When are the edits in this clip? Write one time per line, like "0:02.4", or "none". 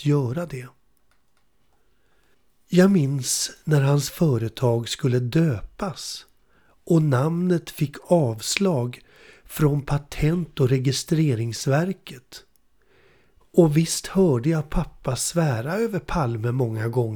0:13.4